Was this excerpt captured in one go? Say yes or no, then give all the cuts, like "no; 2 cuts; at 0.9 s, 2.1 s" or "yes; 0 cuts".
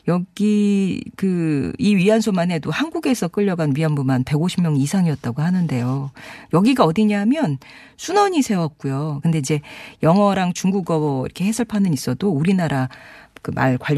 no; 2 cuts; at 6.5 s, 9.2 s